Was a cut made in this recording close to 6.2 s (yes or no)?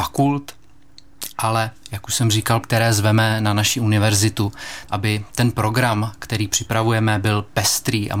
no